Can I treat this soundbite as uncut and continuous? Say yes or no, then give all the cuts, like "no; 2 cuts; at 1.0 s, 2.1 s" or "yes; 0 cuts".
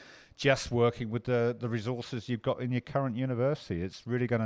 yes; 0 cuts